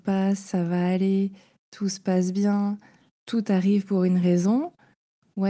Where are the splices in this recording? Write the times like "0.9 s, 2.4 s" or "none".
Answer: none

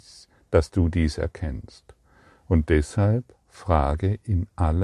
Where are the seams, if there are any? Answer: none

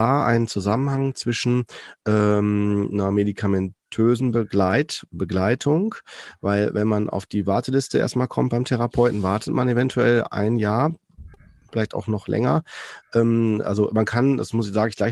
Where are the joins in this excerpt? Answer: none

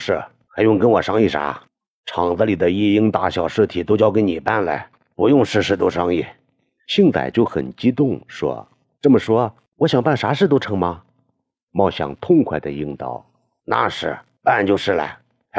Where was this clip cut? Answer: none

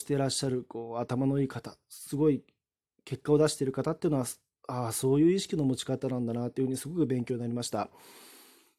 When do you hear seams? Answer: none

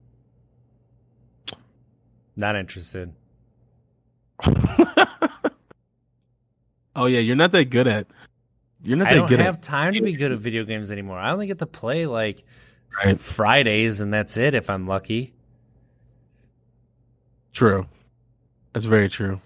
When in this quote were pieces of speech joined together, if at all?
none

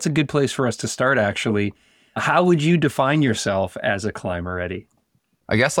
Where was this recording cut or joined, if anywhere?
none

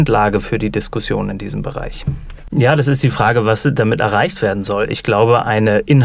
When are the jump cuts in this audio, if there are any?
2.5 s

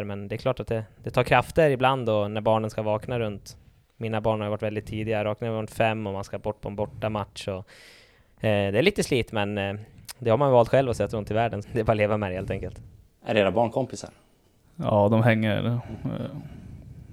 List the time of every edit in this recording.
11.6 s

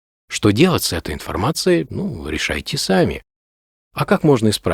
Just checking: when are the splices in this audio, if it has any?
none

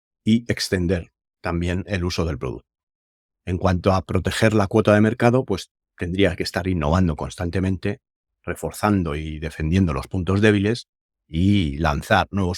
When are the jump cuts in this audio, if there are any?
none

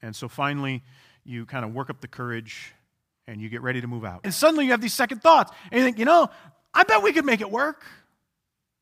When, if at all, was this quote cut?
4.2 s

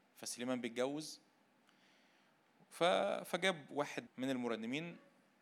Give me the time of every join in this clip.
4.1 s

